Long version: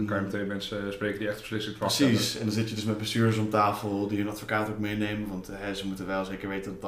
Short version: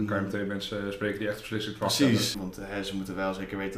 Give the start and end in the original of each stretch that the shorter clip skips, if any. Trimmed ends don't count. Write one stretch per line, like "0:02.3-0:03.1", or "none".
0:02.3-0:05.3